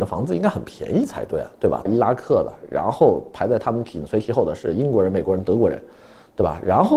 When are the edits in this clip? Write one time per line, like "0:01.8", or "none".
0:01.9